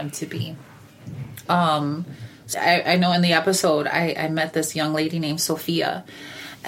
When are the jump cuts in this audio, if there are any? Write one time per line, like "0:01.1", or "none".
0:01.5
0:02.5